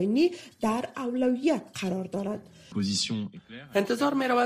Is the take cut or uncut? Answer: cut